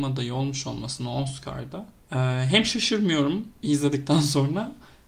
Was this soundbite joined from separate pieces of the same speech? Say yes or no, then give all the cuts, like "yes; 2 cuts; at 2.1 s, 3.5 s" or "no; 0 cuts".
no; 0 cuts